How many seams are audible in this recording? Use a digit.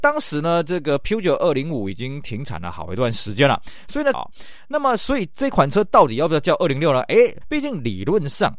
2